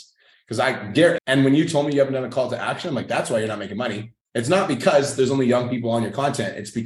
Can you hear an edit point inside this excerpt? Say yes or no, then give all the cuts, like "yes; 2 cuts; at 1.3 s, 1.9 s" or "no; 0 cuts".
yes; 1 cut; at 1.2 s